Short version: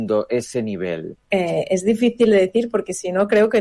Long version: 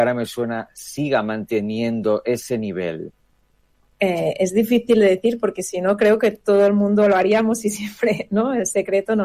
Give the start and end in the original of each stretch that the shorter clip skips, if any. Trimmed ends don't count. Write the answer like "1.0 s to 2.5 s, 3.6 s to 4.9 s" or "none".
3.2 s to 3.9 s